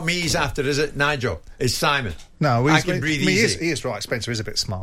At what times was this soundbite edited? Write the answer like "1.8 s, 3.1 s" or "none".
none